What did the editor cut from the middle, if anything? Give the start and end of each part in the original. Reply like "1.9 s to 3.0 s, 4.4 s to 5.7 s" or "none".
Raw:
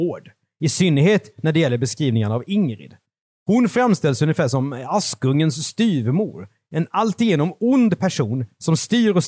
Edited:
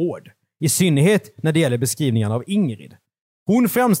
none